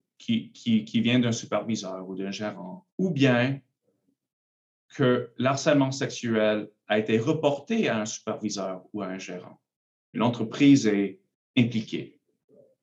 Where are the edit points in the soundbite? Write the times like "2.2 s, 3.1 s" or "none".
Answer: 2.9 s, 10.1 s